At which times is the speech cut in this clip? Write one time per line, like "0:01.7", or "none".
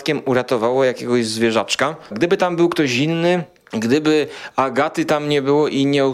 0:02.1

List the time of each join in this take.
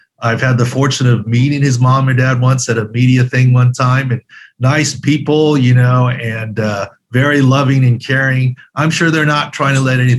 none

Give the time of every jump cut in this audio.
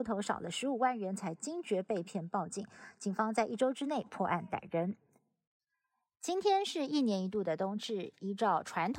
none

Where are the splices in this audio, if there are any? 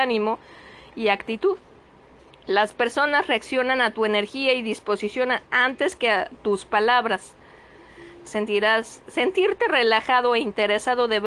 0:08.2

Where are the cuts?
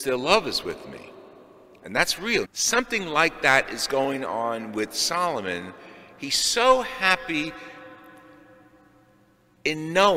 0:02.4

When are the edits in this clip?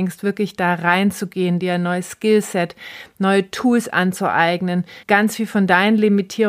0:01.6
0:05.0

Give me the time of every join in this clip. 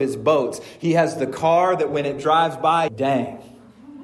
0:02.9

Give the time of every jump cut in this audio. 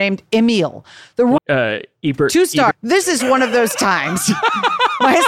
0:01.4
0:02.7

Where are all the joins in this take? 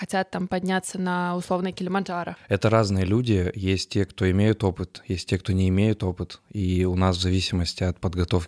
none

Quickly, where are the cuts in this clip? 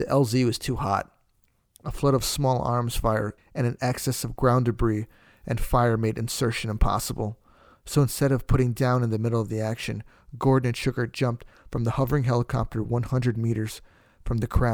0:03.4

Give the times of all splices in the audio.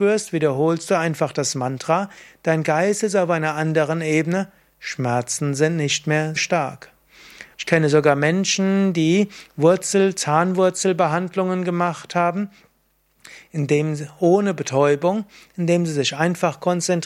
0:06.4
0:07.5

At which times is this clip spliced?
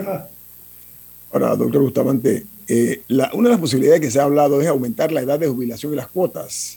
none

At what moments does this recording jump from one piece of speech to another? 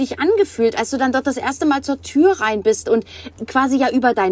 none

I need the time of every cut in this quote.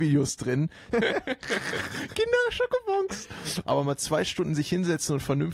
0:00.9
0:03.6

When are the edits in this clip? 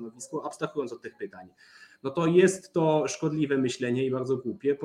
none

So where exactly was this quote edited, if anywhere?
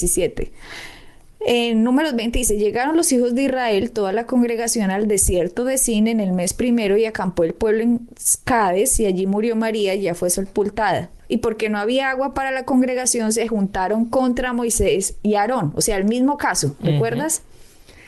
none

